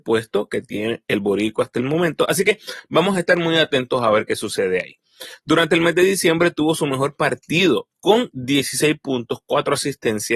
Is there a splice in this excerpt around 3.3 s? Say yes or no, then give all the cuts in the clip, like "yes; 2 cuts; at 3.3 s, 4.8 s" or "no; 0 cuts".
no; 1 cut; at 7.9 s